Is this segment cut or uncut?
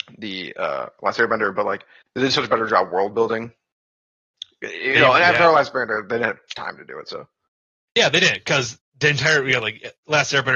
uncut